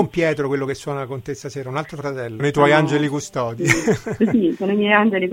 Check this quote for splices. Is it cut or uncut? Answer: cut